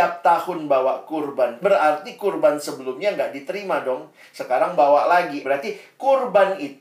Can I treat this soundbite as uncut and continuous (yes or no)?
no